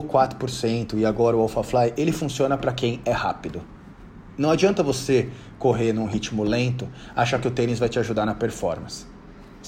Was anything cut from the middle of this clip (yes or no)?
no